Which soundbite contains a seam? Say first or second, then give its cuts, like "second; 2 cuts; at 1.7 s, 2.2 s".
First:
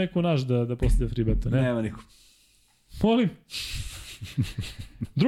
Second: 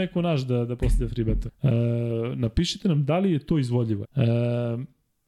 second; 2 cuts; at 1.5 s, 4.0 s